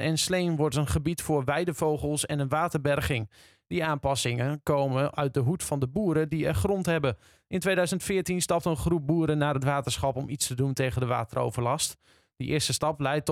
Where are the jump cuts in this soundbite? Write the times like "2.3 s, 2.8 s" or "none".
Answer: none